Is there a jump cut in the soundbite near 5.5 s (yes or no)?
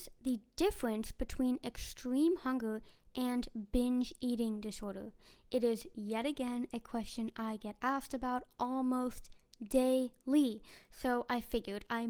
no